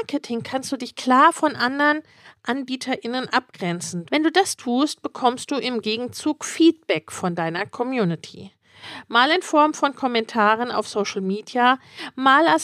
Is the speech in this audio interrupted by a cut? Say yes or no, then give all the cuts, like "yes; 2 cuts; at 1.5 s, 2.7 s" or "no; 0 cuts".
yes; 1 cut; at 4.1 s